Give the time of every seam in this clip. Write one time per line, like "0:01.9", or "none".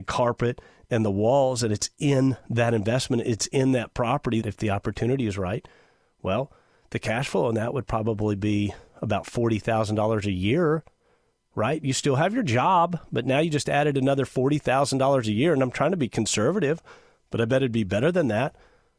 0:04.4